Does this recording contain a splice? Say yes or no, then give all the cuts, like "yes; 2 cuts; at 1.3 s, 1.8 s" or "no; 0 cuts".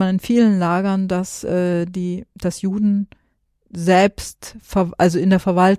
no; 0 cuts